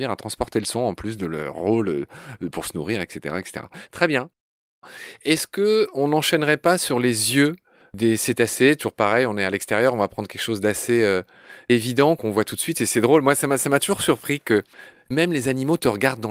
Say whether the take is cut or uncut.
uncut